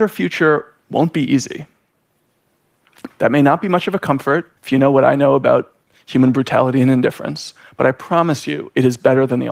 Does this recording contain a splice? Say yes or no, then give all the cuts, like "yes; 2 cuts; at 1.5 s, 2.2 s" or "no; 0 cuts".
yes; 2 cuts; at 3.1 s, 4.6 s